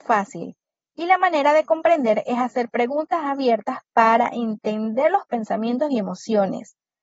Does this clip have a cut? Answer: no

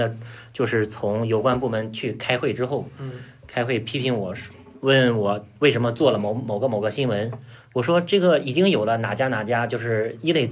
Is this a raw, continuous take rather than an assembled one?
yes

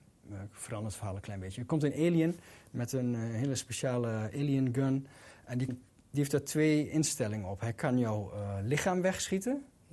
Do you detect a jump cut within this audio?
yes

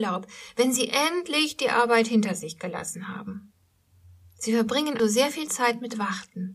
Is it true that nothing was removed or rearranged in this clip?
no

